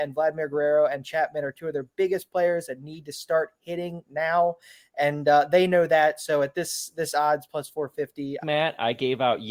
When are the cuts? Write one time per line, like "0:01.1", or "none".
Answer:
0:08.4